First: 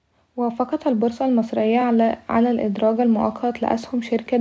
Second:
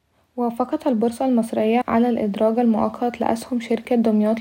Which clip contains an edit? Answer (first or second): second